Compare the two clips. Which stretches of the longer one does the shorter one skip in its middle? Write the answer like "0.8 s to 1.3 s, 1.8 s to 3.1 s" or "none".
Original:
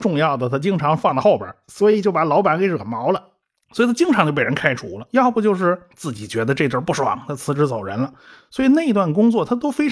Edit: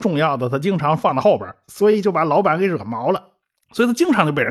none